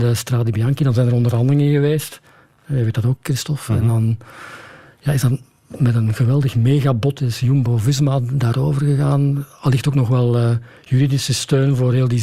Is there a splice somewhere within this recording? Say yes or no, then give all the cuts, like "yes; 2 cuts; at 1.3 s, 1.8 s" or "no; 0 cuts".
yes; 1 cut; at 3.2 s